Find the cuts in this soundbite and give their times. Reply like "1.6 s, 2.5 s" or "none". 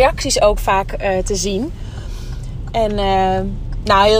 none